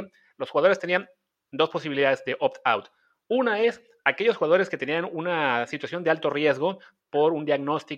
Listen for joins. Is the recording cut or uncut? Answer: uncut